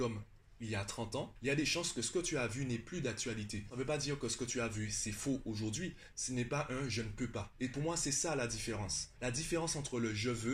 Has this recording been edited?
yes; 1 cut; at 6.1 s

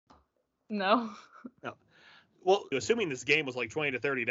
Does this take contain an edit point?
yes; 1 cut; at 2.7 s

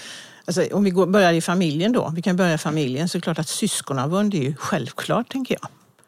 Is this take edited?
no; 0 cuts

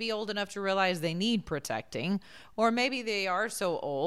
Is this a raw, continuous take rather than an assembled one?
yes; 0 cuts

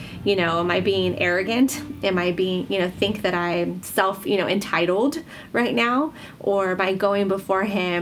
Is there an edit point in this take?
no; 0 cuts

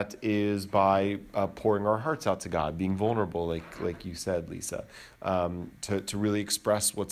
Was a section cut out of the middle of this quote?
yes; 1 cut; at 5.7 s

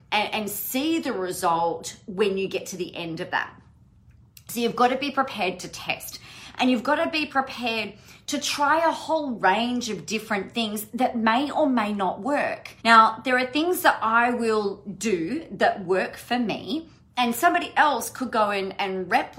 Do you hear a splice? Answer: yes; 1 cut; at 12.8 s

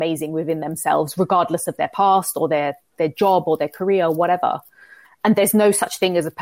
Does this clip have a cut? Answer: yes; 1 cut; at 5.0 s

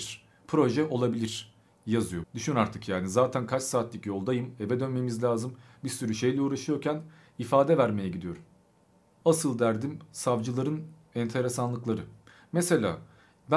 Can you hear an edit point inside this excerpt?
yes; 2 cuts; at 2.2 s, 9.2 s

